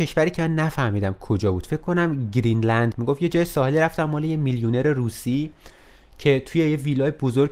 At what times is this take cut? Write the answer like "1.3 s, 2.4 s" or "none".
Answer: 2.9 s

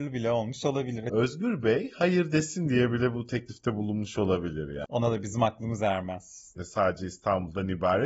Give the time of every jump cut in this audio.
4.8 s, 6.6 s

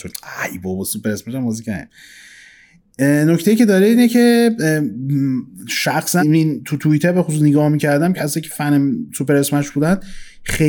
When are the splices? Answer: 6.2 s

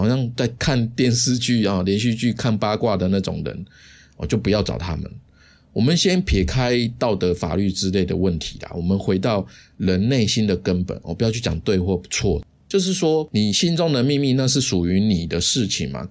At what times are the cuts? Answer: none

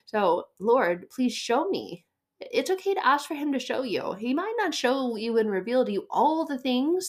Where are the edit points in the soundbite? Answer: none

